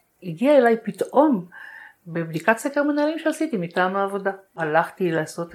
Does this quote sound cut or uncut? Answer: cut